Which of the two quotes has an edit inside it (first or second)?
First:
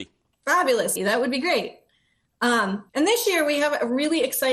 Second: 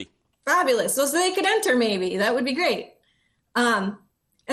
first